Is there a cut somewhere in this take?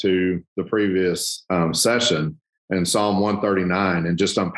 no; 0 cuts

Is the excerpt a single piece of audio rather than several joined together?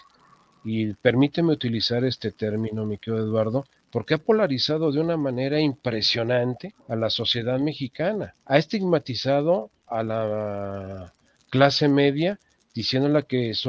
no; 3 cuts; at 3.8 s, 6.8 s, 8.4 s

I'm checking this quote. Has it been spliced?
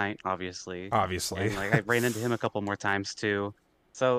no; 0 cuts

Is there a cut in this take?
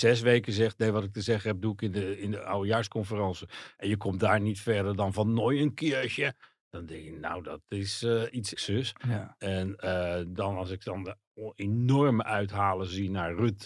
yes; 1 cut; at 8.5 s

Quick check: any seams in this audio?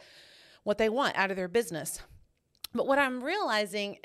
no; 0 cuts

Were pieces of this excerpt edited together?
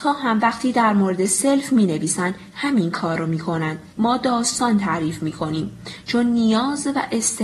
yes; 1 cut; at 3.9 s

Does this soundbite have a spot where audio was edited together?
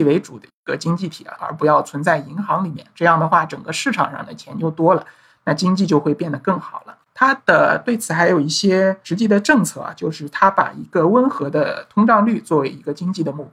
yes; 1 cut; at 1.4 s

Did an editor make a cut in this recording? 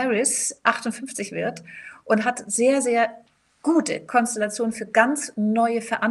no; 0 cuts

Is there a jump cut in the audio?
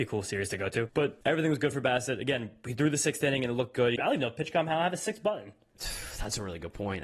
yes; 1 cut; at 4.0 s

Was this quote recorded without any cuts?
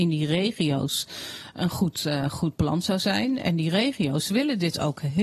yes; 0 cuts

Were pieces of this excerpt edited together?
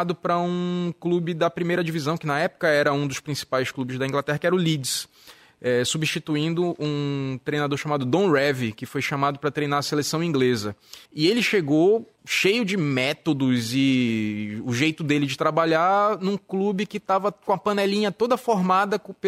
yes; 2 cuts; at 11.1 s, 12.2 s

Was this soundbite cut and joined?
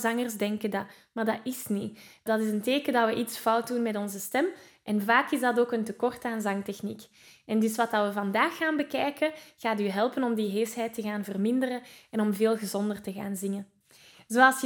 no; 0 cuts

